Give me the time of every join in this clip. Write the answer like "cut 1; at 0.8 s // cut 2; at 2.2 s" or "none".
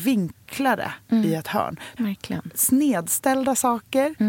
cut 1; at 2.0 s